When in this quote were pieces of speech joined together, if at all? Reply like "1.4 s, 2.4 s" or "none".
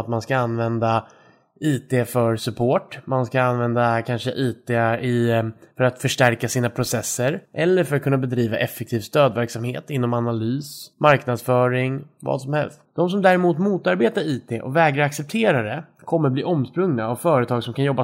12.8 s